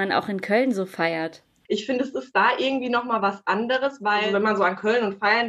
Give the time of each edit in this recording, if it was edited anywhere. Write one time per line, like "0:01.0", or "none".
none